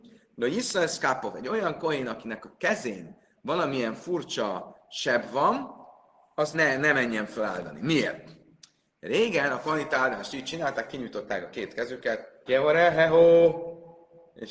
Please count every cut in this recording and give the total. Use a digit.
2